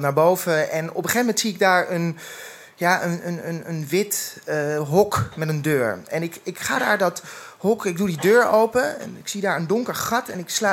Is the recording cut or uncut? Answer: uncut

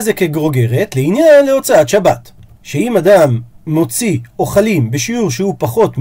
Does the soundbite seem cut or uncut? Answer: uncut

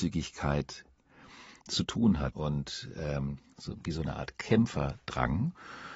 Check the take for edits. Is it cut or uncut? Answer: cut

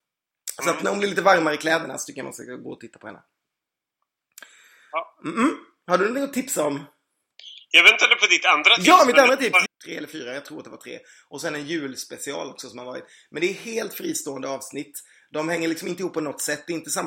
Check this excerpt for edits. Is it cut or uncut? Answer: cut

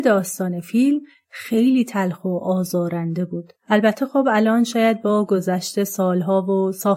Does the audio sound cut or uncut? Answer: cut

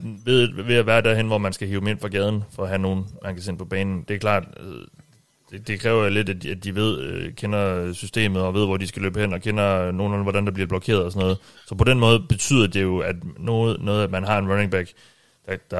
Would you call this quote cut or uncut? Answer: uncut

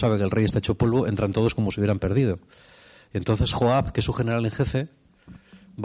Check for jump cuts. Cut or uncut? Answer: uncut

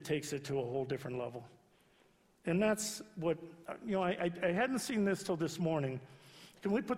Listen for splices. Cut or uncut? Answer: uncut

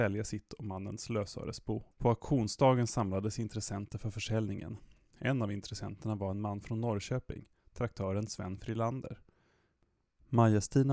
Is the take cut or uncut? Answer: cut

